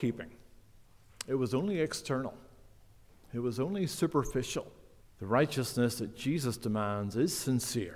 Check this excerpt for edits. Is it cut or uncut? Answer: cut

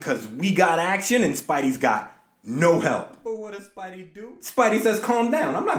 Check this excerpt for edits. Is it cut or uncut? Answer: uncut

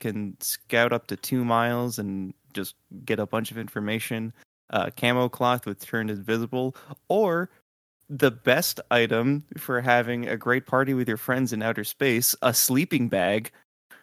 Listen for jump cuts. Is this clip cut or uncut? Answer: uncut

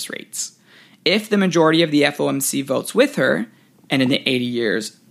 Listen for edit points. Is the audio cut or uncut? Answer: uncut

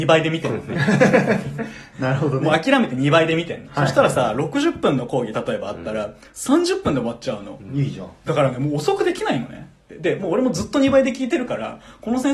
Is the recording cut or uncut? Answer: cut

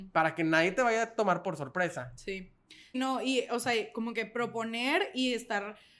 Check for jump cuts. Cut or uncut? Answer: cut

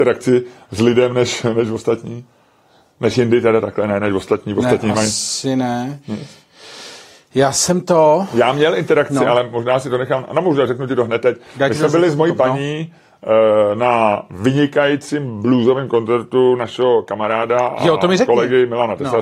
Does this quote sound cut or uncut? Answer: uncut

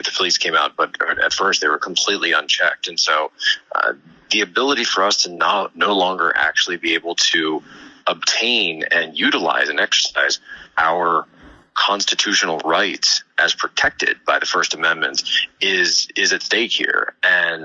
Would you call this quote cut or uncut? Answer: uncut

